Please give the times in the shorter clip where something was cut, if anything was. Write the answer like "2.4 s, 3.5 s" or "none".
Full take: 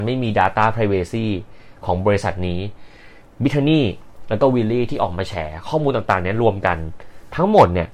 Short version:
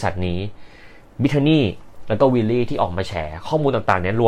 none